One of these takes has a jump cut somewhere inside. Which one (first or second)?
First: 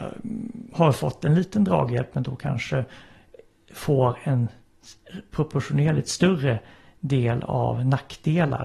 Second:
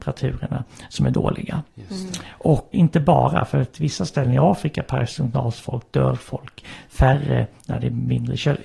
second